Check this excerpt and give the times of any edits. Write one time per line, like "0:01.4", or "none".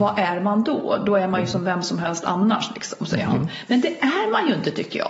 none